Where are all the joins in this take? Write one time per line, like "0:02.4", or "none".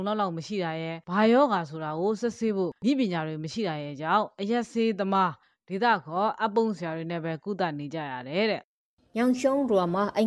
none